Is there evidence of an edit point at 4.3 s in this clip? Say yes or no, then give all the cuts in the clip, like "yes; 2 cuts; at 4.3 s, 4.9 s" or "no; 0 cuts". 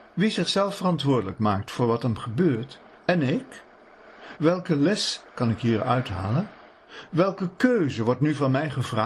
yes; 2 cuts; at 2.9 s, 4.3 s